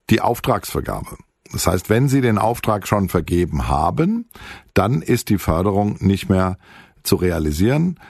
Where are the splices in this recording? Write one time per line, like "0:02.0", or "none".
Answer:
none